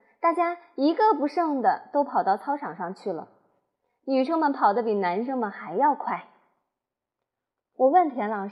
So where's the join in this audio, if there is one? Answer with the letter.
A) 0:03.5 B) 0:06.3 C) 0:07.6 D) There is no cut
D